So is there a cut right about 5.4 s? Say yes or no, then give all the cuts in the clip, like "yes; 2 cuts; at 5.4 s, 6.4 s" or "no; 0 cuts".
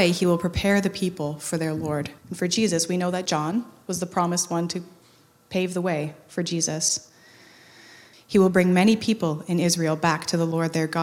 no; 2 cuts; at 2.2 s, 8.1 s